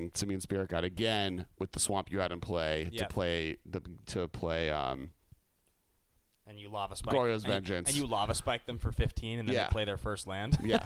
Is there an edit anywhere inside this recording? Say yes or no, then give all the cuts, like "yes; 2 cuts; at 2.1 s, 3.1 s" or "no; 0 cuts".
no; 0 cuts